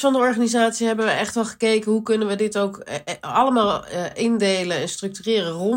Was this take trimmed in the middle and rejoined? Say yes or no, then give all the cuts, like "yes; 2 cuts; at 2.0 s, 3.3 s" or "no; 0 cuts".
no; 0 cuts